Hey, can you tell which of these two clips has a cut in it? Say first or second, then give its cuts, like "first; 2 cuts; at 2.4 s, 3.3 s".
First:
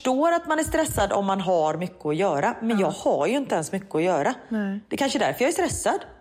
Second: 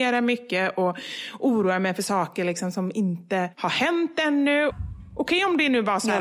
second; 1 cut; at 4.7 s